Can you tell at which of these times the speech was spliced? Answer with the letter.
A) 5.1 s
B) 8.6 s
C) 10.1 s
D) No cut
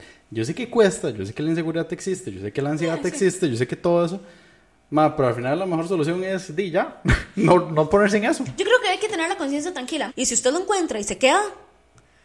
C